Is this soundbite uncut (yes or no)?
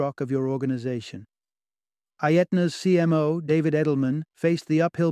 yes